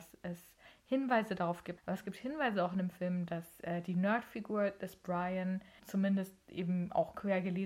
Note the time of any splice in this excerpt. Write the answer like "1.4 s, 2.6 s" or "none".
1.8 s, 5.8 s